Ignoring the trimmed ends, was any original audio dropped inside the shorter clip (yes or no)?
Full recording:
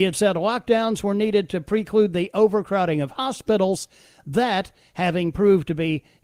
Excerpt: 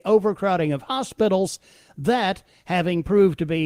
no